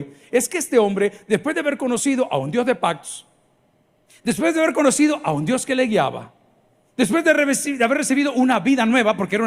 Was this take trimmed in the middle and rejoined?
no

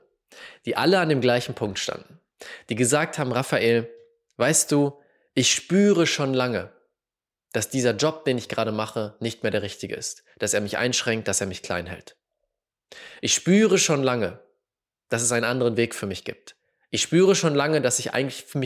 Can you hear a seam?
no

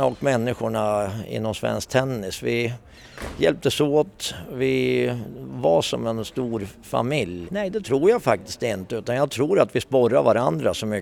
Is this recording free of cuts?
no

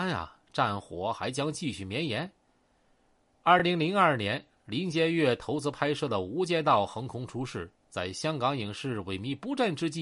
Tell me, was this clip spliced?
no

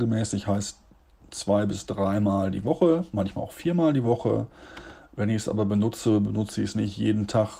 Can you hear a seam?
no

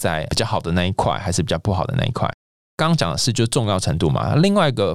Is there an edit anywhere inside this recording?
no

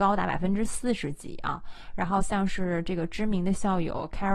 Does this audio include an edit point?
no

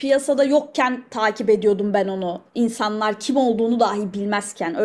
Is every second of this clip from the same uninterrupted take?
yes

